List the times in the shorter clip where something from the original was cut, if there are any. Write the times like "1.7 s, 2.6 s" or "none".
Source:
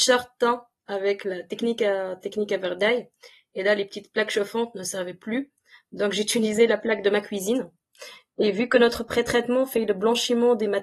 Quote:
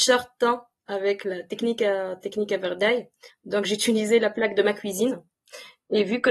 3.3 s